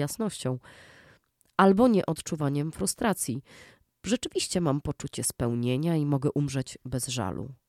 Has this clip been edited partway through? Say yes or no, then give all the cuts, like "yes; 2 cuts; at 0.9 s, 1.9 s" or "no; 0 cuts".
no; 0 cuts